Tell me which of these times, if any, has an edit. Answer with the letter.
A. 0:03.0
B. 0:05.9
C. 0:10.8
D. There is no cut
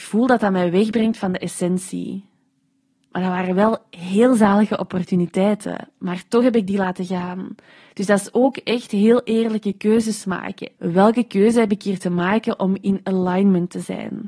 C